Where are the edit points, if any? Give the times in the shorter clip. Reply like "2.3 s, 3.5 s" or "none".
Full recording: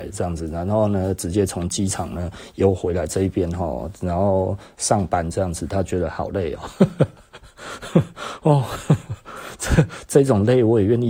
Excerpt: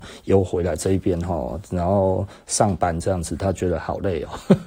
none